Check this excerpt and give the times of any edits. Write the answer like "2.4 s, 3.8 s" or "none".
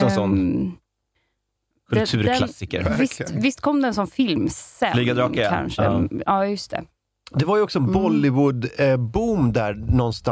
none